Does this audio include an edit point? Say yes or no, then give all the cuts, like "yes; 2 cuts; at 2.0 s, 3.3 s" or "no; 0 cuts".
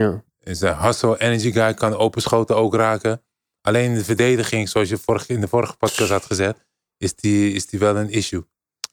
no; 0 cuts